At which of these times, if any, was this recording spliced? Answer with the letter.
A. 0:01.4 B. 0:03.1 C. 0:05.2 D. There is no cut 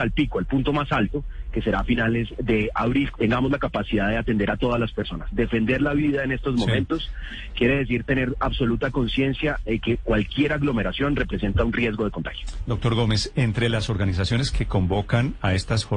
B